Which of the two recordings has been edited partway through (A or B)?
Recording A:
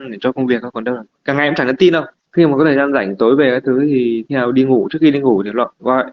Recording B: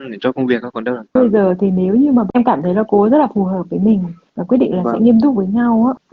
B